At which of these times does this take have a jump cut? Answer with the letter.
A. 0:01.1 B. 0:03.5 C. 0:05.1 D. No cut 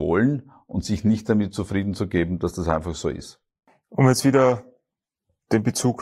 D